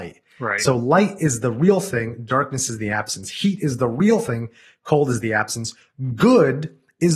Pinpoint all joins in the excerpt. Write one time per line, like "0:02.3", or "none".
none